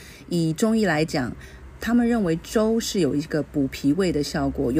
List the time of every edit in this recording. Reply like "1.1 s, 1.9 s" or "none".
none